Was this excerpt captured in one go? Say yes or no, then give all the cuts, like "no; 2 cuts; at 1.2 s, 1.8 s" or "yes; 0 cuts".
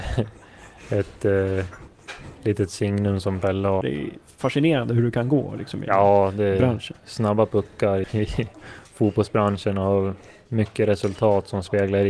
no; 2 cuts; at 3.8 s, 8.0 s